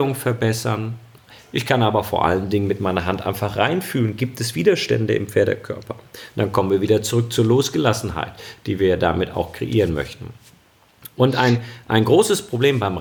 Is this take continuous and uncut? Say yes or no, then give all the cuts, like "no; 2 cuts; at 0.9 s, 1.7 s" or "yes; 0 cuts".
yes; 0 cuts